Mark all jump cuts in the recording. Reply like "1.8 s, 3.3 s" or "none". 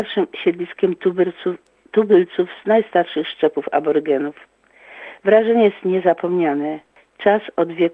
5.2 s